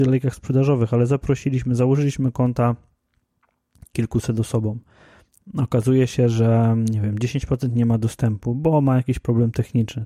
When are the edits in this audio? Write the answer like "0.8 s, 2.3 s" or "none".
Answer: none